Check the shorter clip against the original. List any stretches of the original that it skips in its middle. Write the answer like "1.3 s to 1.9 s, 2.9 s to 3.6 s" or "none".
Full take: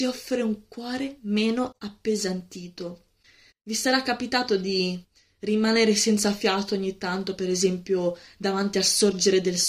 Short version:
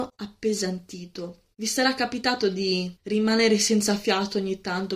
3.1 s to 3.6 s, 5.0 s to 5.3 s